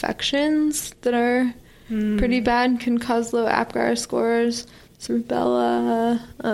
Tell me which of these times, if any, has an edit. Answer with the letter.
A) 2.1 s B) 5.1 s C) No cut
B